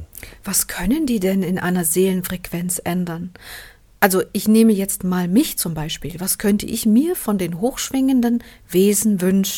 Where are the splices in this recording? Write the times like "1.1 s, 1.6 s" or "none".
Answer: none